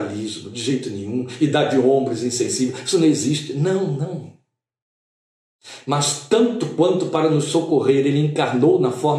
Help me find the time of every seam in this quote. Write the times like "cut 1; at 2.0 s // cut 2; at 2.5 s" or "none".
none